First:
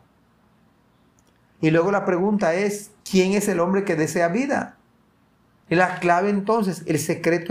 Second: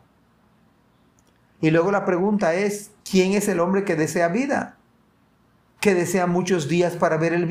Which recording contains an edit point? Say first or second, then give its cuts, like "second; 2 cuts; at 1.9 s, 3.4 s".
first; 1 cut; at 5.6 s